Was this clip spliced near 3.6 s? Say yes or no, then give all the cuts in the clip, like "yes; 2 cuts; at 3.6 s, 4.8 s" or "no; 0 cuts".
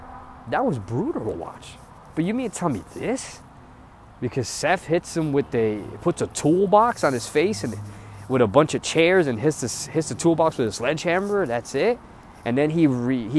no; 0 cuts